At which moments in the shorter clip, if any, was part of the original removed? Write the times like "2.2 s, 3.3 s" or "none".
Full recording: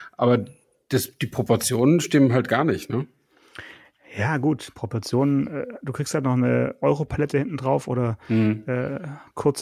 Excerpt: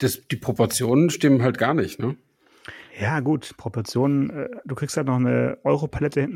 2.9 s